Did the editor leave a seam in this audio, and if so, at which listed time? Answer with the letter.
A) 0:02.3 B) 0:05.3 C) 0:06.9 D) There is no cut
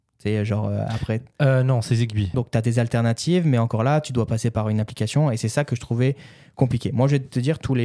A